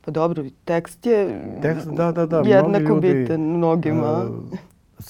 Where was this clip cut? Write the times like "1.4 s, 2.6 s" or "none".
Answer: none